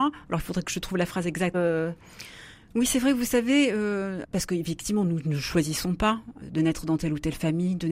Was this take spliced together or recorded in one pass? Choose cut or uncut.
cut